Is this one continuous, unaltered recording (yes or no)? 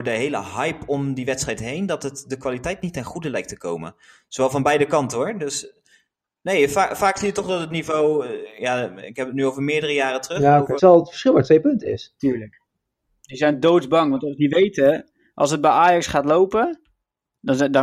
no